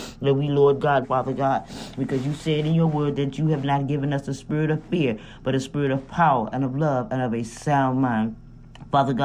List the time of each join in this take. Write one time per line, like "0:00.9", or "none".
0:01.0